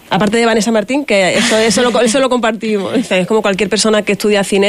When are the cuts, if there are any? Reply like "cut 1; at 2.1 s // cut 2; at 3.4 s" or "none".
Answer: cut 1; at 3.1 s